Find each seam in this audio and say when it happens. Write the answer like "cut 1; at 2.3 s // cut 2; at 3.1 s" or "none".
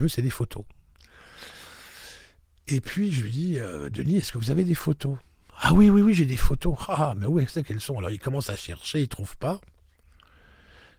none

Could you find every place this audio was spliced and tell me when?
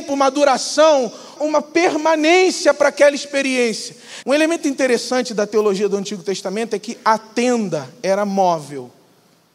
cut 1; at 1.4 s // cut 2; at 4.2 s

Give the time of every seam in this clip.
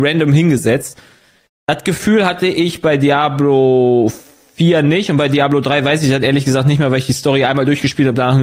none

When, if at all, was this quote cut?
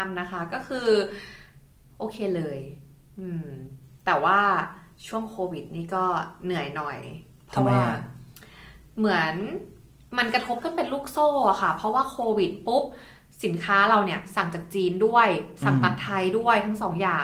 none

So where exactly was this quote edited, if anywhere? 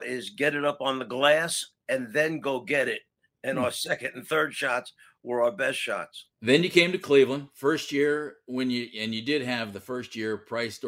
cut 1; at 6.3 s

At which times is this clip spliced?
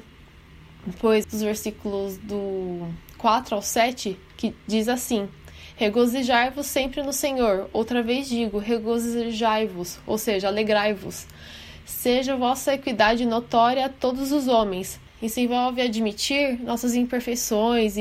cut 1; at 1.2 s // cut 2; at 15.1 s

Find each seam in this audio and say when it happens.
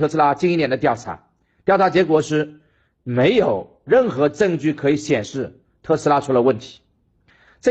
none

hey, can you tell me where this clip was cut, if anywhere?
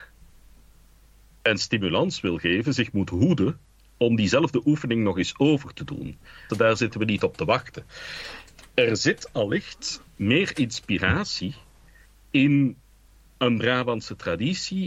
cut 1; at 6.5 s

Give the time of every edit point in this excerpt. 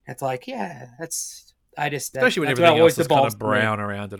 none

